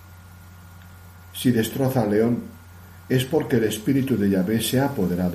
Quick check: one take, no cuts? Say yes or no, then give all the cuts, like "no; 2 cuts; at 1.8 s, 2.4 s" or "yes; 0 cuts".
yes; 0 cuts